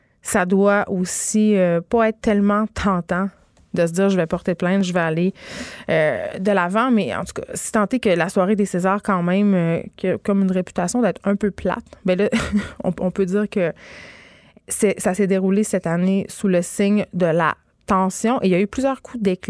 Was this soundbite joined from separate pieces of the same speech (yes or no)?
no